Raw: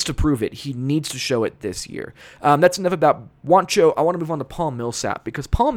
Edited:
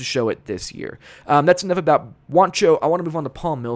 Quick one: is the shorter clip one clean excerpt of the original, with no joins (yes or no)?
yes